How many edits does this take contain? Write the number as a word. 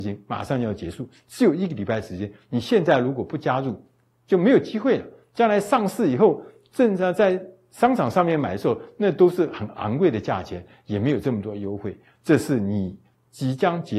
zero